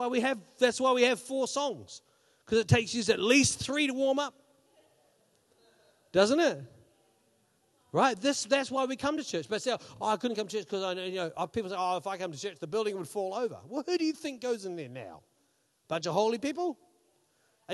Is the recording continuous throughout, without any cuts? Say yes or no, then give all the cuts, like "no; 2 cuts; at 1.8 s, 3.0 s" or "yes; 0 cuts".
yes; 0 cuts